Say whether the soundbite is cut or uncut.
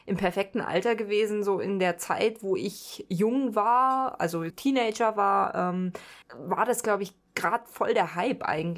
cut